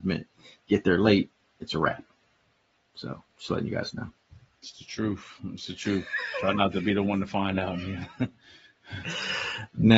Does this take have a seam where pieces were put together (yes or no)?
no